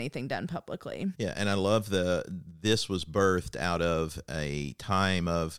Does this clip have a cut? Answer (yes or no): yes